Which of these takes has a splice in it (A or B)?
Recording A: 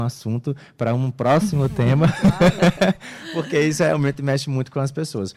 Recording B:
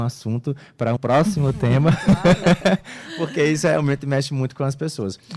B